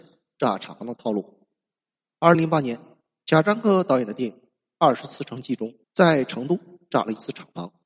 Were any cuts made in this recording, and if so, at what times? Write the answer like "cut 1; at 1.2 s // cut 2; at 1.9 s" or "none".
cut 1; at 2.3 s // cut 2; at 5.8 s